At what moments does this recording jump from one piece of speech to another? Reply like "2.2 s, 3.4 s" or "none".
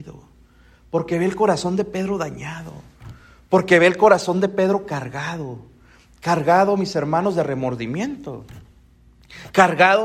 none